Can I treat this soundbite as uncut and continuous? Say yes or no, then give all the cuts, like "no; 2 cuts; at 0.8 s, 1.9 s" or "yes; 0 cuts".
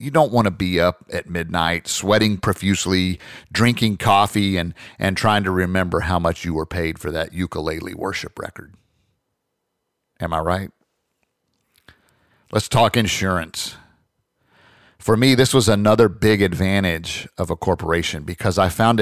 yes; 0 cuts